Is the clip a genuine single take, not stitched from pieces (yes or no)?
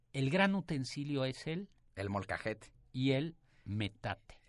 yes